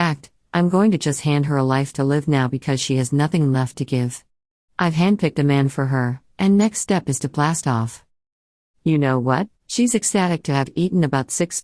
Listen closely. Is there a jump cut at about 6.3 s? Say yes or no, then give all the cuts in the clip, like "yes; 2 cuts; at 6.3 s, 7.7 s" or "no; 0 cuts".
yes; 2 cuts; at 6.3 s, 9.6 s